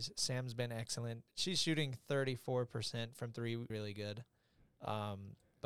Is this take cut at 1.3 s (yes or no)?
no